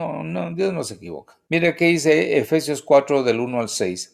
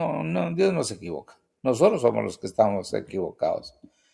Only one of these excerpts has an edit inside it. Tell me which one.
first; 1 cut; at 1.5 s

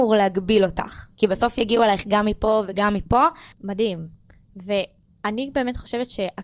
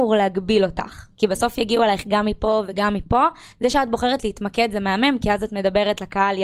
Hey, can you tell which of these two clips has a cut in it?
first; 1 cut; at 3.5 s

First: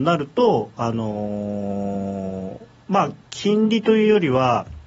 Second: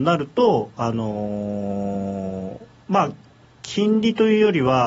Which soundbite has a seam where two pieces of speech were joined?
first; 1 cut; at 3.2 s

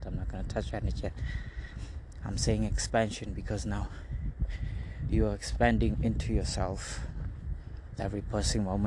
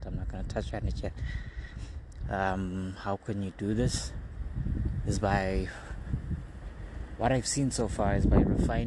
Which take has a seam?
second; 1 cut; at 2.2 s

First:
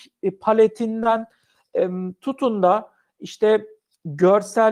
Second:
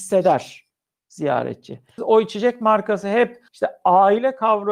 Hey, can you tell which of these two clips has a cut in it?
second; 2 cuts; at 2.0 s, 3.5 s

